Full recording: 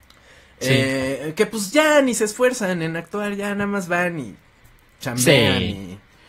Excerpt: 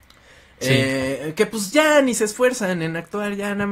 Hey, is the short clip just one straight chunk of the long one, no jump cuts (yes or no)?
yes